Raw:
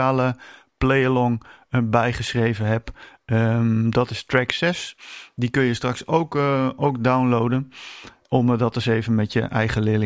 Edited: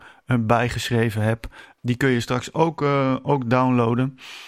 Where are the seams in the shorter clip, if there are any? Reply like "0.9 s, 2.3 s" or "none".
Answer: 1.8 s